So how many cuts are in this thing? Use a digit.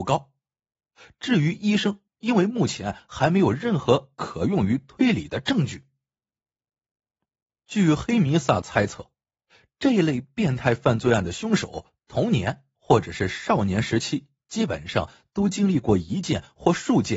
1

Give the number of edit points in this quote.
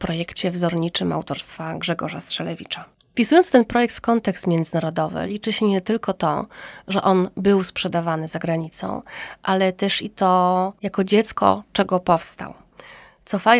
0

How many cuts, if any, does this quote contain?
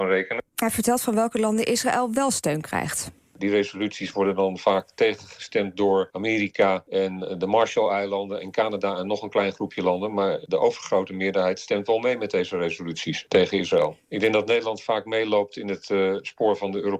0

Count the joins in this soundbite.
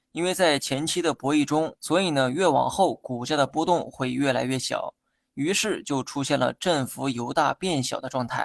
1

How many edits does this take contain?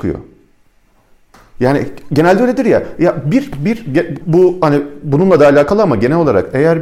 1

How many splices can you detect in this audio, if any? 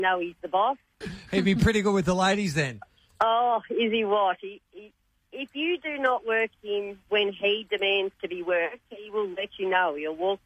1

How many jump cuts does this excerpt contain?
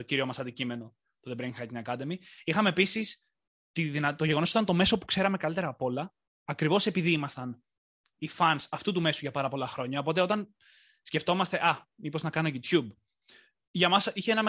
0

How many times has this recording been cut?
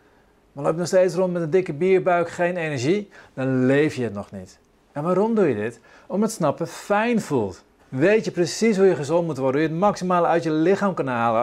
1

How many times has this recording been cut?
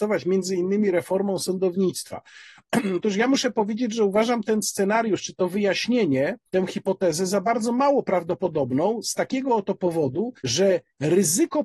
2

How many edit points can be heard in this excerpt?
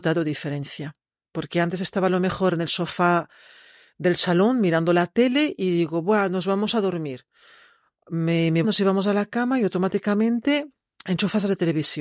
2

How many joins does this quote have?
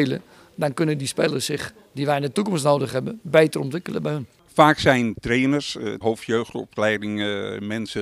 1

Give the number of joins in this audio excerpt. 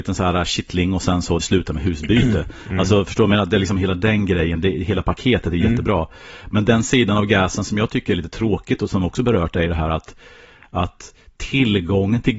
1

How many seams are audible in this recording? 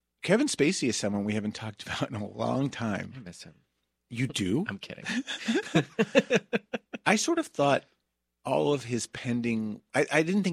0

